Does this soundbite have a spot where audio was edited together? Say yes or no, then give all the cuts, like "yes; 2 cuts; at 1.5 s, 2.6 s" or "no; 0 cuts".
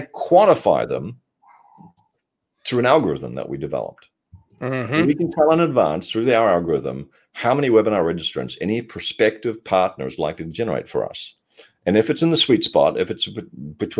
no; 0 cuts